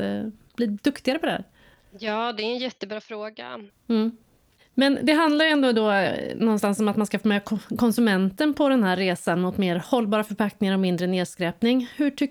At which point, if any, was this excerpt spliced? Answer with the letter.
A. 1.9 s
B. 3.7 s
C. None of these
B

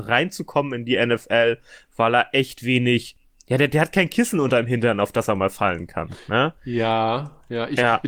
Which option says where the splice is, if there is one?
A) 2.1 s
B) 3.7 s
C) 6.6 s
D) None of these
D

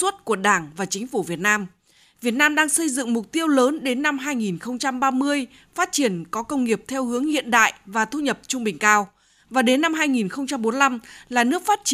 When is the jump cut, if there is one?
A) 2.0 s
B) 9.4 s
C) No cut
A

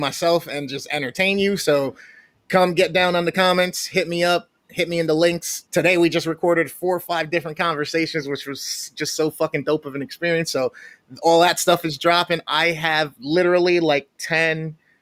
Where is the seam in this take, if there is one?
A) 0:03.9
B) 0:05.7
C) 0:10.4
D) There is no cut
B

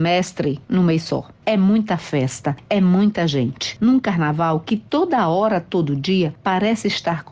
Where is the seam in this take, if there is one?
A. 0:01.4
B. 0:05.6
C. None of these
A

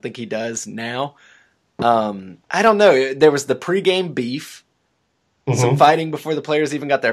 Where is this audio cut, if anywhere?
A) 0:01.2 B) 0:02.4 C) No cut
B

